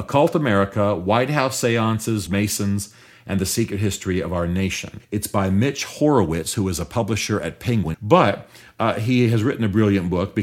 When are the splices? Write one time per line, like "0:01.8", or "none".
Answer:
0:02.3
0:05.0
0:07.9